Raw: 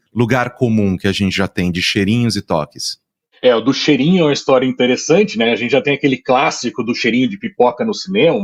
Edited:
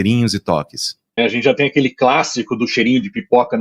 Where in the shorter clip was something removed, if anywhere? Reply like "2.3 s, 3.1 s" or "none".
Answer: 1.2 s